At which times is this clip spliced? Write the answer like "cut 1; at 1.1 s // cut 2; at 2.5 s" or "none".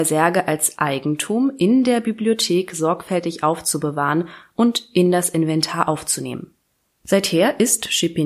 none